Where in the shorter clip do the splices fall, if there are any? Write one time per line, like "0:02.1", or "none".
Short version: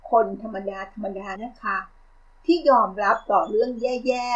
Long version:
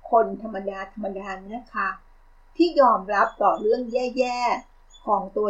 0:01.4